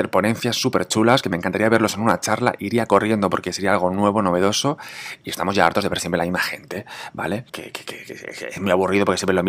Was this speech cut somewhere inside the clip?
yes; 1 cut; at 7.5 s

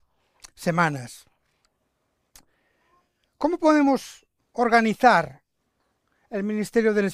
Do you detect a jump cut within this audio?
no; 0 cuts

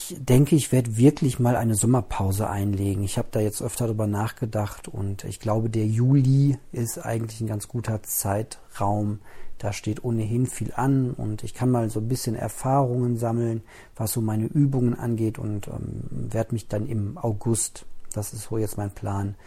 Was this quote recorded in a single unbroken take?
yes; 0 cuts

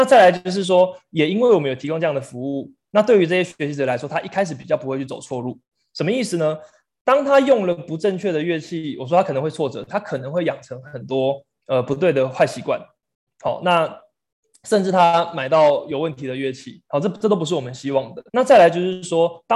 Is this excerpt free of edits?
no; 1 cut; at 18.3 s

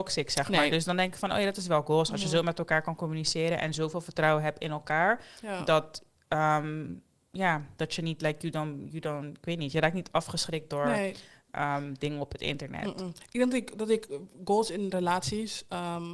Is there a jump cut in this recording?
no; 0 cuts

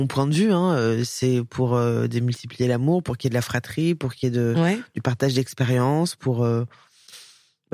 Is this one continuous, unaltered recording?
yes; 0 cuts

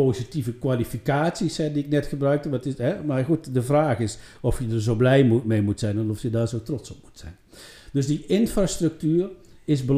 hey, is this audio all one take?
yes; 0 cuts

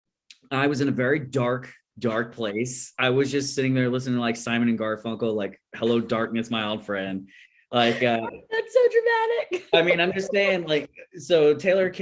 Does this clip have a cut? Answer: no; 0 cuts

